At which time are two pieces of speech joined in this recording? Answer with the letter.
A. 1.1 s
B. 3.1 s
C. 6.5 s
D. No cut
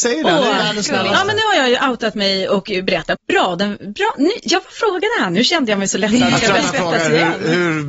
B